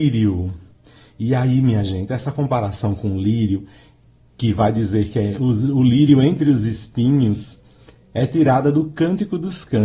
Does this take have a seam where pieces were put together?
no; 0 cuts

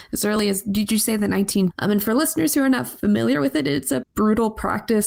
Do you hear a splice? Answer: yes; 2 cuts; at 1.7 s, 4.0 s

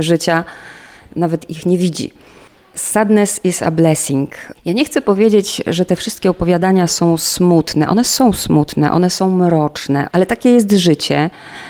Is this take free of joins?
yes; 0 cuts

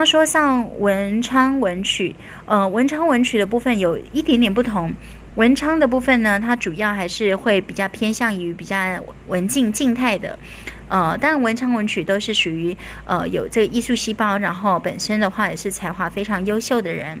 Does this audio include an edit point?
no; 0 cuts

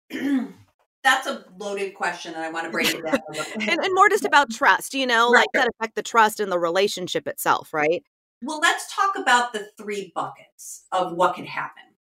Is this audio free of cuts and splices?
no; 1 cut; at 5.5 s

